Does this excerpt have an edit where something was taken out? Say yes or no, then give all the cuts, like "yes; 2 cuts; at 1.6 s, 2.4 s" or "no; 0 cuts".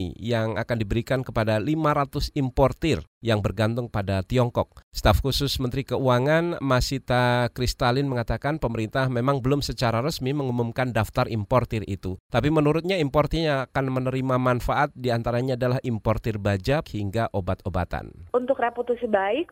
yes; 1 cut; at 16.8 s